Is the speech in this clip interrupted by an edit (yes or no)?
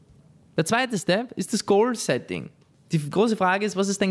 no